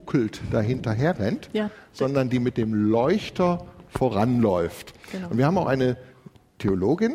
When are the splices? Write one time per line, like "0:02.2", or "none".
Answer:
none